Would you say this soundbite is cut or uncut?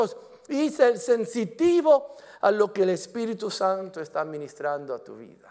uncut